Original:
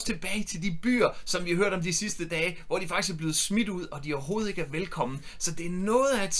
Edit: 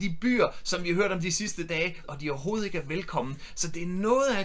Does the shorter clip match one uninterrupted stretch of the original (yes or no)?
no